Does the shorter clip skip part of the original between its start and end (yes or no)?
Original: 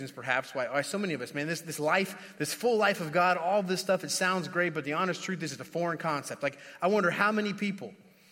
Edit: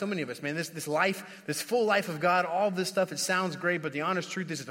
no